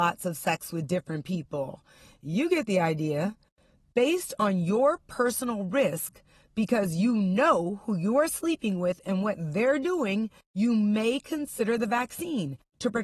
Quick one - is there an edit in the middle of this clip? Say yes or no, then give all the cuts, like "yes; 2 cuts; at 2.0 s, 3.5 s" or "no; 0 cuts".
no; 0 cuts